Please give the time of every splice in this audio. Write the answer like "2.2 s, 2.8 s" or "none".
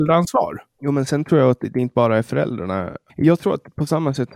3.1 s